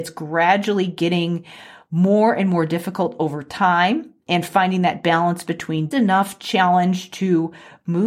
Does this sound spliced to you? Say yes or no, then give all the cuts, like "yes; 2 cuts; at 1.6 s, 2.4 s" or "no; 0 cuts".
yes; 1 cut; at 5.9 s